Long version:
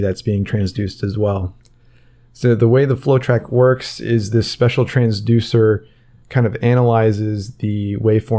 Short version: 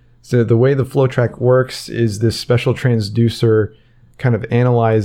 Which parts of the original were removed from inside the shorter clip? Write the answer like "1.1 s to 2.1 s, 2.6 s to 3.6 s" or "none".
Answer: none